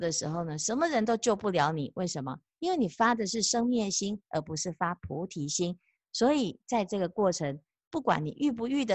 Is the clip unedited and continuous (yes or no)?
yes